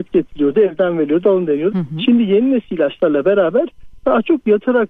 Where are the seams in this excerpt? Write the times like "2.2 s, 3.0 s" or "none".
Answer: 1.7 s